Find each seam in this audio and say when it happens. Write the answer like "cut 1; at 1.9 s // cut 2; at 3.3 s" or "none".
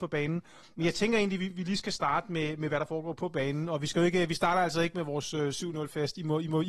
none

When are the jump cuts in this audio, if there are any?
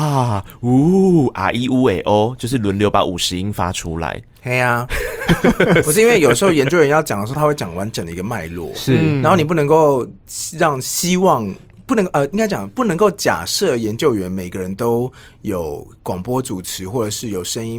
none

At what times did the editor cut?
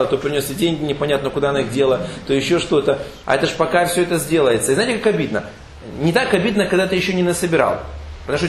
cut 1; at 3.2 s

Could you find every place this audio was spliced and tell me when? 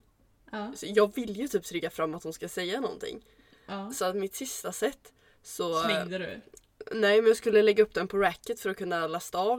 none

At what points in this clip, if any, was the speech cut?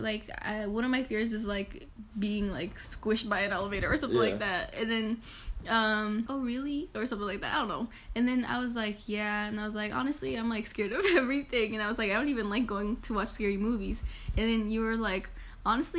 cut 1; at 6.3 s

